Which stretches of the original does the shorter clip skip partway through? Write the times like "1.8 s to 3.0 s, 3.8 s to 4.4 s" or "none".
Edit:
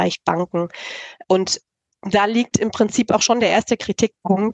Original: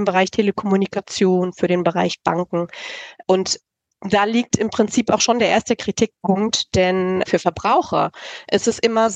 none